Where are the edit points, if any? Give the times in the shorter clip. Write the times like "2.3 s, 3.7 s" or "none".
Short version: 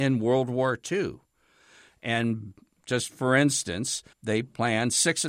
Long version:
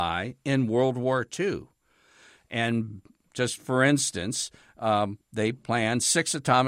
4.1 s